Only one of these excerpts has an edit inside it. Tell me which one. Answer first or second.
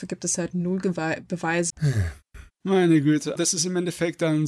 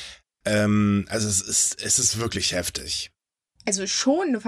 first